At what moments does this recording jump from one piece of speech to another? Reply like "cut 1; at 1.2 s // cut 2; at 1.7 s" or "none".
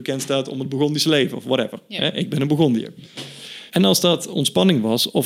cut 1; at 3.7 s